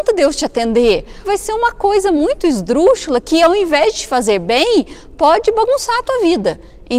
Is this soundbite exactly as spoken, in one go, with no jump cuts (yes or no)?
no